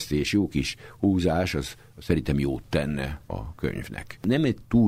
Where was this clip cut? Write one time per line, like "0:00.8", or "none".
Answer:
0:03.3